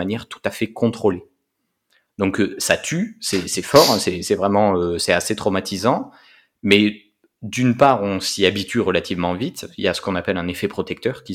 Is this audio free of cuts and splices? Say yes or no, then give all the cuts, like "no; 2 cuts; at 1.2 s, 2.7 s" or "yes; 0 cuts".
yes; 0 cuts